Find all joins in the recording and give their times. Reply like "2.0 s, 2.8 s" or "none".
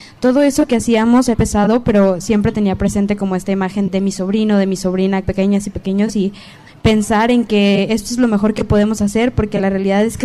1.3 s, 3.9 s, 5.2 s